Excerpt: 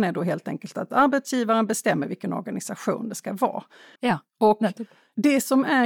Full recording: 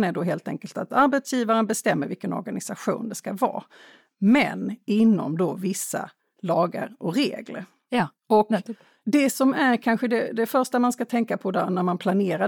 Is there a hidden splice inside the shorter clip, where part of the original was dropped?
yes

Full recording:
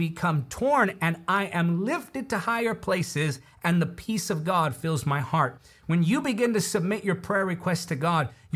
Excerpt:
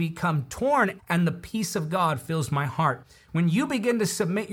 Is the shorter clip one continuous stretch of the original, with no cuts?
no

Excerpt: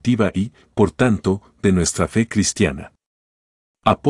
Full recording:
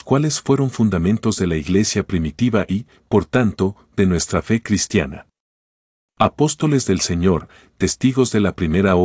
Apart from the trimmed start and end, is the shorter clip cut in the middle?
no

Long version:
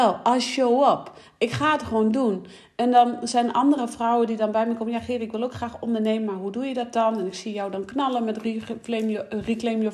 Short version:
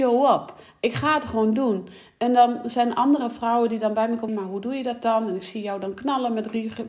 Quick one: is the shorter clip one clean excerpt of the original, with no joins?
no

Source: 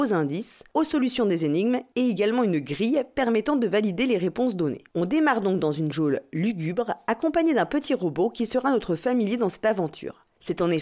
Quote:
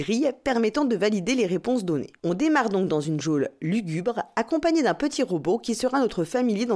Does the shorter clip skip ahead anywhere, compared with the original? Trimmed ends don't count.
no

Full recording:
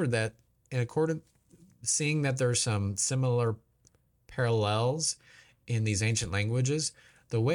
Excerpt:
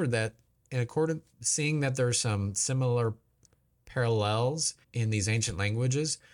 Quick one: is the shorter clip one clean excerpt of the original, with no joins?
no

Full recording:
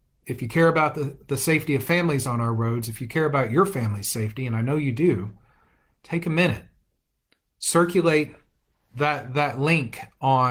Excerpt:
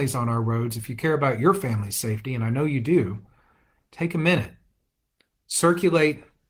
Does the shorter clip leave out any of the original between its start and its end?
no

